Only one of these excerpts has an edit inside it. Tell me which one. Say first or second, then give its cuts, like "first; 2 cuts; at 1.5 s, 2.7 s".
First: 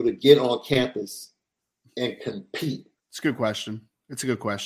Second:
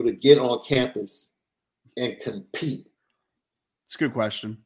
first; 1 cut; at 3.0 s